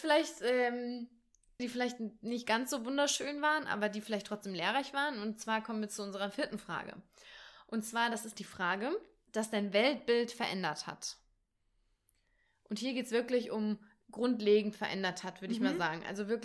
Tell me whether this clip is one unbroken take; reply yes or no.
no